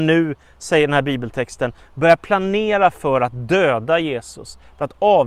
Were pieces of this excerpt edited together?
no; 0 cuts

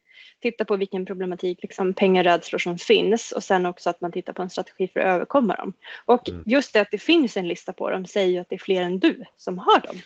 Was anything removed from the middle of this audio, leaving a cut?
yes; 1 cut; at 1.6 s

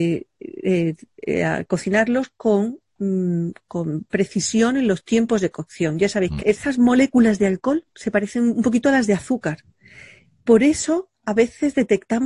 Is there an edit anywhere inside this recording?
yes; 1 cut; at 6.4 s

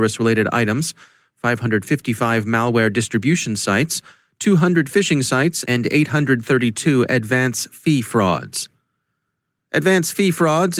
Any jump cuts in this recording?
no; 0 cuts

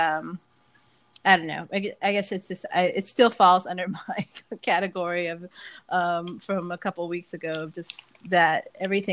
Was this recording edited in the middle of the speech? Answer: no; 0 cuts

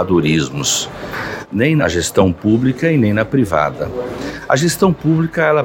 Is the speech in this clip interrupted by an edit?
no; 0 cuts

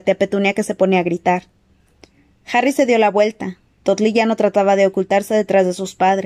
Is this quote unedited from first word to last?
yes; 0 cuts

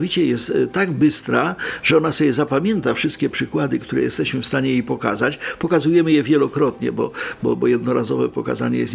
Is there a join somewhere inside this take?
no; 0 cuts

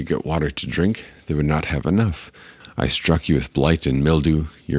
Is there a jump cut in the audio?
yes; 1 cut; at 2.6 s

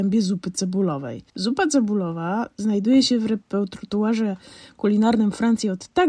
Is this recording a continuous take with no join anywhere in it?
no; 1 cut; at 1.3 s

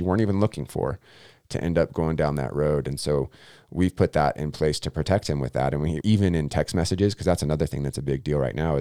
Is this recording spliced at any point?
yes; 1 cut; at 6.0 s

